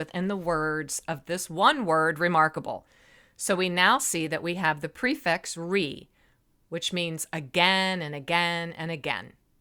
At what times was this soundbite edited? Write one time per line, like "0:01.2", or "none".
none